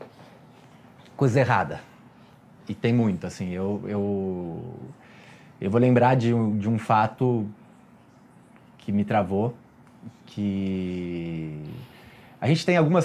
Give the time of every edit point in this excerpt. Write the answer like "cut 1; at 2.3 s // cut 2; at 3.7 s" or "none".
none